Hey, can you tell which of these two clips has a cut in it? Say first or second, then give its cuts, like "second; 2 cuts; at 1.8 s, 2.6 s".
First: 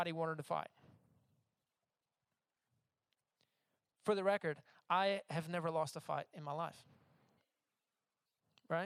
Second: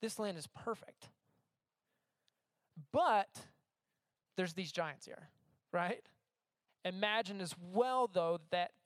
second; 1 cut; at 6.7 s